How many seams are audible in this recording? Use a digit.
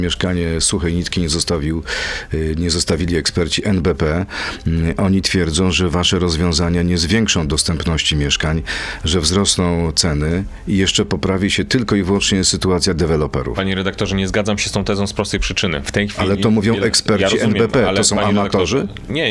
0